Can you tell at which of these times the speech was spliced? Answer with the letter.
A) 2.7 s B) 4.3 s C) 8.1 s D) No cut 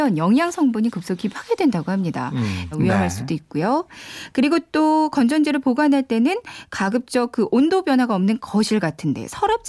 A